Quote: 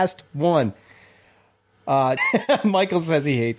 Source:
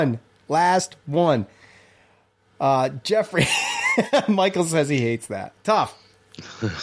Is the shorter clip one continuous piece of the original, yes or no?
no